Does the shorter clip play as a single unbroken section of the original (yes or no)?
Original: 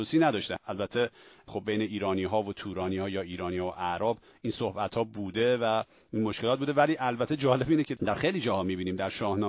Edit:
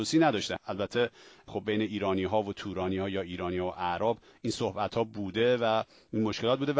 yes